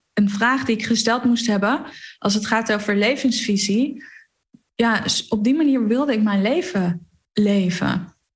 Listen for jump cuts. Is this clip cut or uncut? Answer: uncut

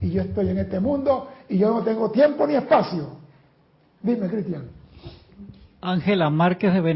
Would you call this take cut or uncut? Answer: uncut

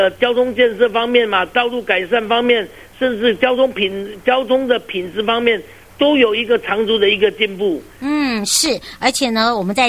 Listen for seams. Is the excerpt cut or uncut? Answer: uncut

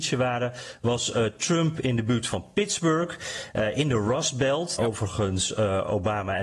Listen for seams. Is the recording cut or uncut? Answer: cut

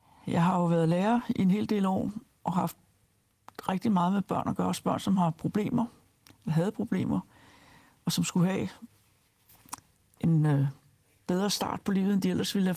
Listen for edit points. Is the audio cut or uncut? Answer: uncut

